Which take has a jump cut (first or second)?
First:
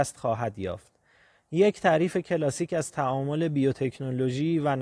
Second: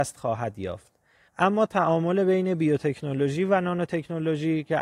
second